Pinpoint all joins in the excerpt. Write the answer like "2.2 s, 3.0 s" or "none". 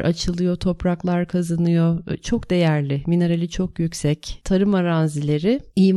4.4 s